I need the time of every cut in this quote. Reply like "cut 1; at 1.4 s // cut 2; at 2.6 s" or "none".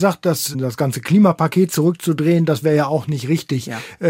none